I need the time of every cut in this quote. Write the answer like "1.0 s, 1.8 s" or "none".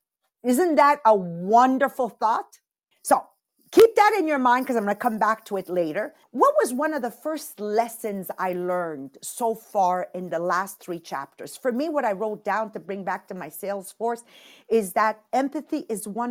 2.9 s, 6.2 s